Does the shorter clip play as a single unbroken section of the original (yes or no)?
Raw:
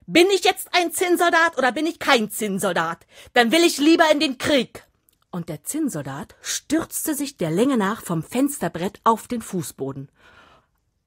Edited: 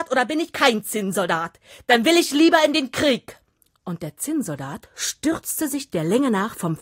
yes